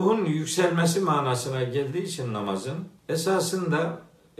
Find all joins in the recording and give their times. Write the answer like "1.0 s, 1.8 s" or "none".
3.0 s